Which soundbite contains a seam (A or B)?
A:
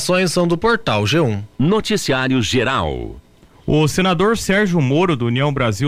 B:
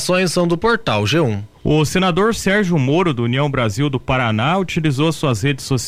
B